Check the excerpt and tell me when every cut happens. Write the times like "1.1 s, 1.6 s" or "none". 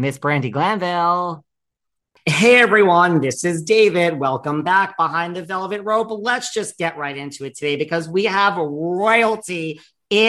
none